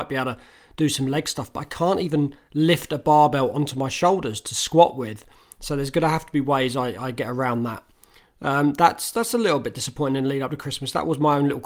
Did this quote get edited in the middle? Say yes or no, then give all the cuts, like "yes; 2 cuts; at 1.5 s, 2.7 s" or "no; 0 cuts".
no; 0 cuts